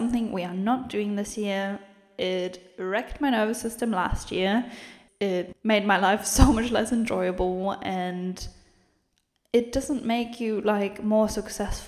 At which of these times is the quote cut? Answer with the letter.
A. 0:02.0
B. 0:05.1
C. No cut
C